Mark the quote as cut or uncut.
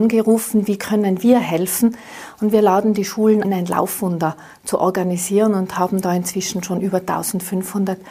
cut